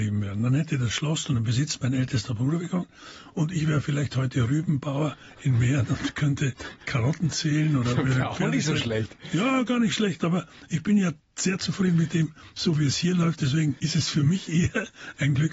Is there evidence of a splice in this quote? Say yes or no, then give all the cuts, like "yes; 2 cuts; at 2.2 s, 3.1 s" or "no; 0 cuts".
no; 0 cuts